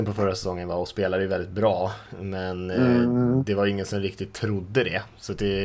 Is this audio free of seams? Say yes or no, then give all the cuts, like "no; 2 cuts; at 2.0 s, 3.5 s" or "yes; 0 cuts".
yes; 0 cuts